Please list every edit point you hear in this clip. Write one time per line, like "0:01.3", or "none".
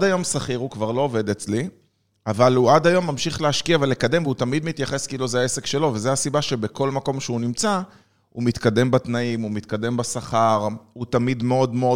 none